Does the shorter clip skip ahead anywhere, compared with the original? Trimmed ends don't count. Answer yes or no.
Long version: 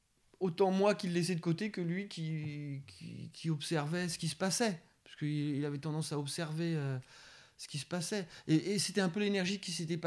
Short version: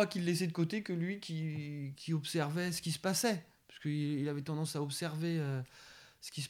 yes